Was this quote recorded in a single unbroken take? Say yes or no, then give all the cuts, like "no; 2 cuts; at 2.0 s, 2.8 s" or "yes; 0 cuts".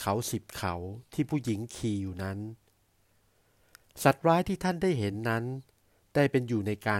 yes; 0 cuts